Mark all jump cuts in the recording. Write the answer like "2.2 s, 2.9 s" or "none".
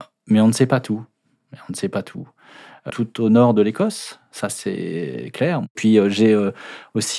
2.9 s